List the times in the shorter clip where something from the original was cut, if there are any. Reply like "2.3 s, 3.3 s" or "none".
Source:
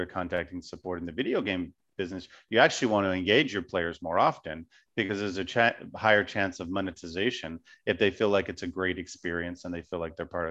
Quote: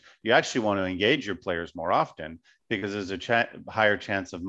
none